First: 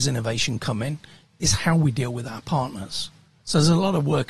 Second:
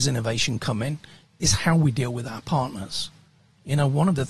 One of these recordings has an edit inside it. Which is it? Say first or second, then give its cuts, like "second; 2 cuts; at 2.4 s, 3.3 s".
first; 1 cut; at 3.4 s